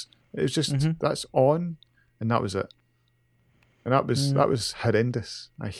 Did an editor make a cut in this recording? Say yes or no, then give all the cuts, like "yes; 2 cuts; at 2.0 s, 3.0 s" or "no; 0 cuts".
no; 0 cuts